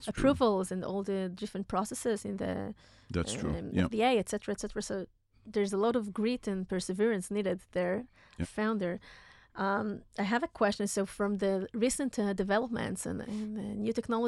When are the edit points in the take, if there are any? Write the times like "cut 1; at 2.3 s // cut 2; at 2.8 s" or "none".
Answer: cut 1; at 8.4 s // cut 2; at 13.2 s